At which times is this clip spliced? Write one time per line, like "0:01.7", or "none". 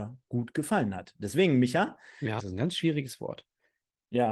0:02.4